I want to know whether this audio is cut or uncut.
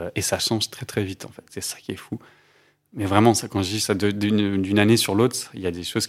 uncut